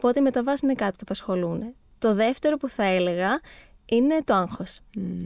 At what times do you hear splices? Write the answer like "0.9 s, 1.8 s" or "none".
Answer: none